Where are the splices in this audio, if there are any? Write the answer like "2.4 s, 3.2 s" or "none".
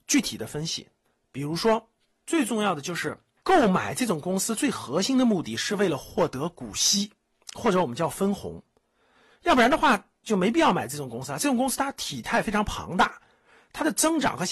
2.1 s, 3.4 s